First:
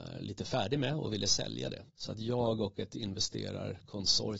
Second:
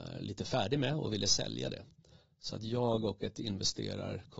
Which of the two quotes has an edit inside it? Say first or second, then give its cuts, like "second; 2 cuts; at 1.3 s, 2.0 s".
first; 1 cut; at 1.9 s